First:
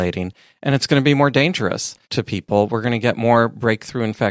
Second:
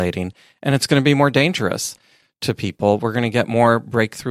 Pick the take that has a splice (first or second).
first